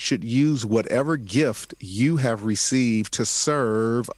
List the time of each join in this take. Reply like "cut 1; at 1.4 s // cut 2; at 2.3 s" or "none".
none